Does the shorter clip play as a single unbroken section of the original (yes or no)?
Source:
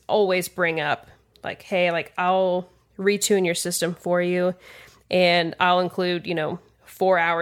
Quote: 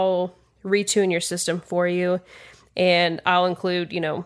yes